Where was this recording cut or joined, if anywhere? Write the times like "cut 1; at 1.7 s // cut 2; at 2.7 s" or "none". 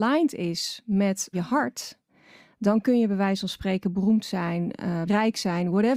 cut 1; at 1.3 s // cut 2; at 5.1 s